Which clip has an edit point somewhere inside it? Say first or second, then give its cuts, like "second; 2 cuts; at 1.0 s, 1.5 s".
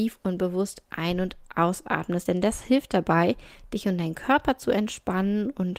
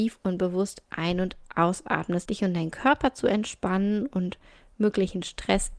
second; 1 cut; at 2.3 s